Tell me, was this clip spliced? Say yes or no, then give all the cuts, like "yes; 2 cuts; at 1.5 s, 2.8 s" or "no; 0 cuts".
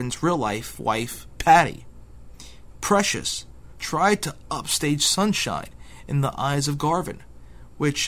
yes; 1 cut; at 3.7 s